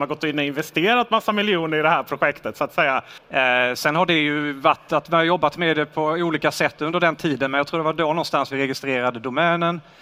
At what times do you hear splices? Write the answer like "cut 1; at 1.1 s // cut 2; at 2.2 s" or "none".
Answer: cut 1; at 3.2 s

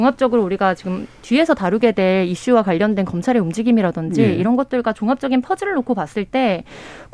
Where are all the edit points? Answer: none

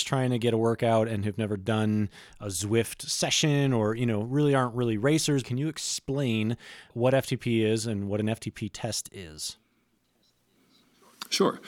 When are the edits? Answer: cut 1; at 5.4 s // cut 2; at 6.9 s

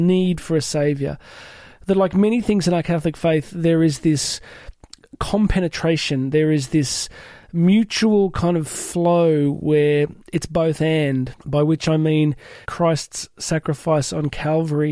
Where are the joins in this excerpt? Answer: cut 1; at 11.4 s // cut 2; at 12.6 s

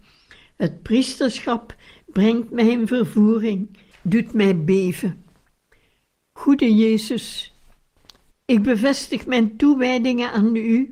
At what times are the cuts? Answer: cut 1; at 3.9 s // cut 2; at 8.3 s

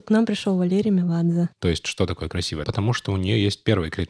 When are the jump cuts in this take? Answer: cut 1; at 1.5 s // cut 2; at 2.6 s

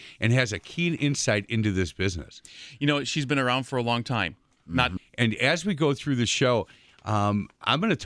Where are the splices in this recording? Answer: cut 1; at 5.0 s

